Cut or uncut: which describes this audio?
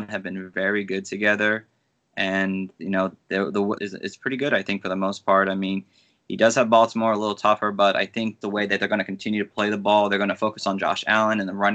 cut